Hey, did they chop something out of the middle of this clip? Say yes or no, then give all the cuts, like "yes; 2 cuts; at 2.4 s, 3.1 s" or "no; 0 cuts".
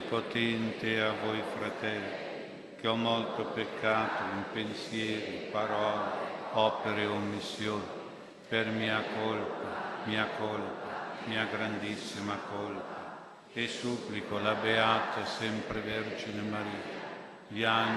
no; 0 cuts